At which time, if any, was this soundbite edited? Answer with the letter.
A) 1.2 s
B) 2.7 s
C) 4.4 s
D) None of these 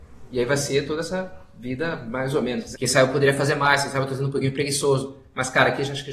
B